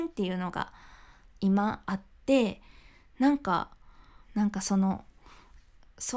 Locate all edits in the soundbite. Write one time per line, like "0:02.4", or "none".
0:01.8
0:04.2